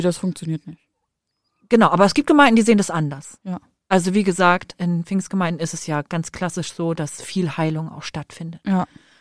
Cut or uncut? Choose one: uncut